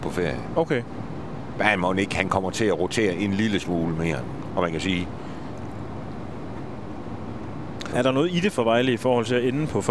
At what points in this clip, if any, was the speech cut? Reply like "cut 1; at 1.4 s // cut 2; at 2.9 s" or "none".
cut 1; at 4.5 s // cut 2; at 7.9 s